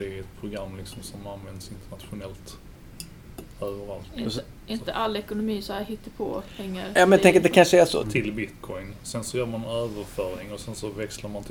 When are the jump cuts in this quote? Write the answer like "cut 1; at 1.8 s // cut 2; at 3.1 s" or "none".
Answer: cut 1; at 4.1 s // cut 2; at 8.0 s